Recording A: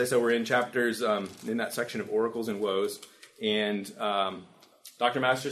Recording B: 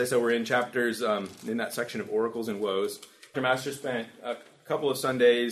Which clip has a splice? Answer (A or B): B